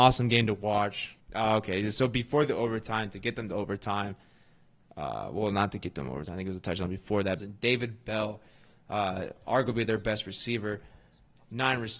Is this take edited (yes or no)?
yes